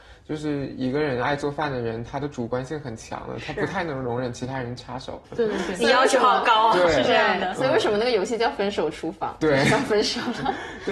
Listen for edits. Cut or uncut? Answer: uncut